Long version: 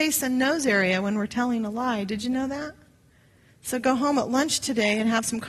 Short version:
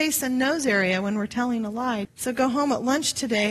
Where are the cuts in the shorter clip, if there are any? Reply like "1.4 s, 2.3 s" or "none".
2.0 s